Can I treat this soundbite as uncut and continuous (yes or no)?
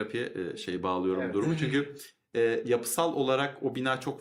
yes